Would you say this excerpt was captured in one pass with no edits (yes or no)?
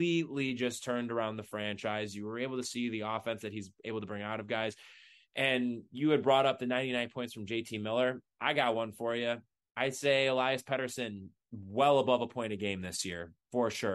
yes